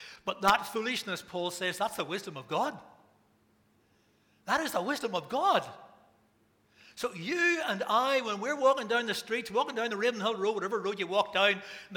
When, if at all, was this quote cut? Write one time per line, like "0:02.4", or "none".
none